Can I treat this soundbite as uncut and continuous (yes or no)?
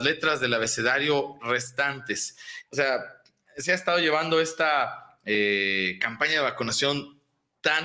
no